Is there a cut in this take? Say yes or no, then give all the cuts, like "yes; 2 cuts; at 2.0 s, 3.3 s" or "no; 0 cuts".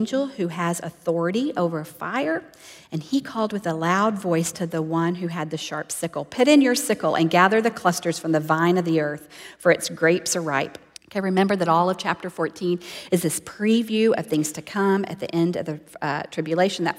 yes; 1 cut; at 10.9 s